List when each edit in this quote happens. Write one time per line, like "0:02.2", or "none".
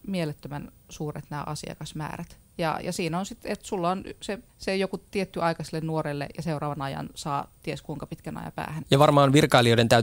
0:04.5
0:08.8